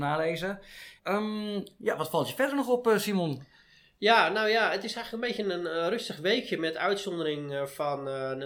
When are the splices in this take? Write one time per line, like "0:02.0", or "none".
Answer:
0:01.0